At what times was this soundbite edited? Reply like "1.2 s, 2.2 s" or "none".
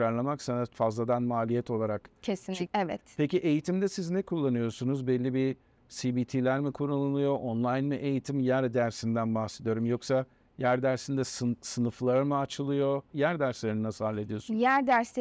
2.7 s, 13.1 s